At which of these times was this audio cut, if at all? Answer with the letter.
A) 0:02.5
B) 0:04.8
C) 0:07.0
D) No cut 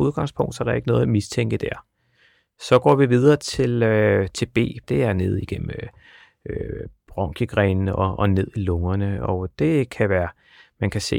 B